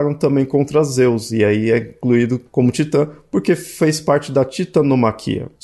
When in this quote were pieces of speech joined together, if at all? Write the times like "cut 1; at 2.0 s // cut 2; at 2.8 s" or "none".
none